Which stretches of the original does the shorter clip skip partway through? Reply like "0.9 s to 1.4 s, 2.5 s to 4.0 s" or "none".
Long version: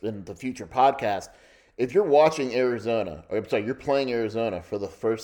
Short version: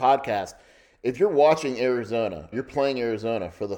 3.3 s to 3.6 s